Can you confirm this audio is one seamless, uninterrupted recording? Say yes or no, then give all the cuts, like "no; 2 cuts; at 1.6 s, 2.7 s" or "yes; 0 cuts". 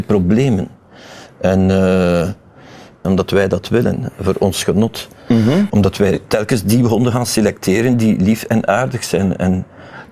no; 2 cuts; at 3.0 s, 5.7 s